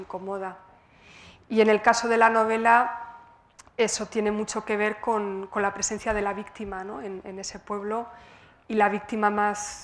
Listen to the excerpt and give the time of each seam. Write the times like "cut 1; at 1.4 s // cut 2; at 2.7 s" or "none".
none